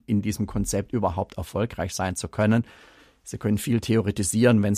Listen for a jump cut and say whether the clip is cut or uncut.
uncut